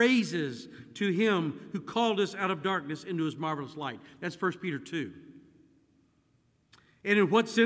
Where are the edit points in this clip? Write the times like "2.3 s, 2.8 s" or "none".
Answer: none